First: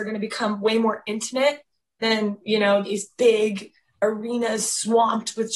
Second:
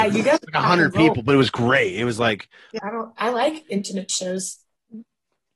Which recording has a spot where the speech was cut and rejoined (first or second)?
second